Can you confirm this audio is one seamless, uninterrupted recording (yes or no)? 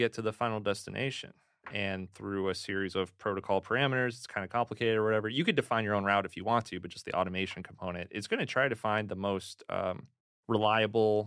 yes